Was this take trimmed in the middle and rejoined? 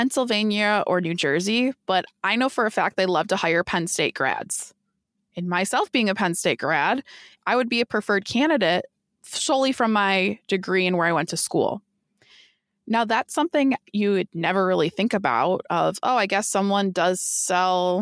yes; 1 cut; at 7.4 s

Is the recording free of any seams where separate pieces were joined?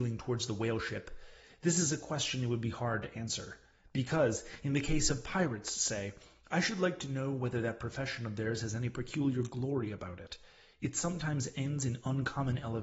yes; 0 cuts

